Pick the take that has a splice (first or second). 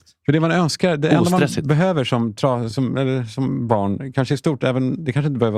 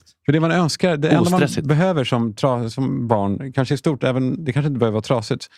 second